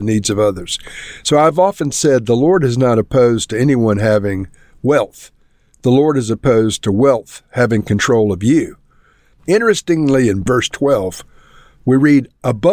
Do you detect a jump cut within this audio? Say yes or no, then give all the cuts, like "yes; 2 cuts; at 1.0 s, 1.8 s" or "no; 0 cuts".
yes; 1 cut; at 9.4 s